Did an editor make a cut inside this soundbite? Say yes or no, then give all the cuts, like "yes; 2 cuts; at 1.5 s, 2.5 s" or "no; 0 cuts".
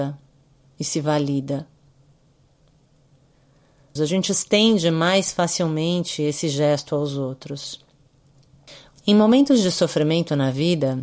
yes; 2 cuts; at 4.0 s, 8.9 s